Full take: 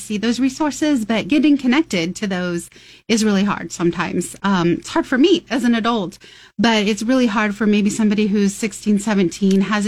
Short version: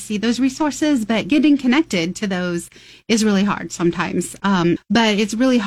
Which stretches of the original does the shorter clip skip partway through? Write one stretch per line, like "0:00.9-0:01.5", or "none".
0:04.8-0:06.4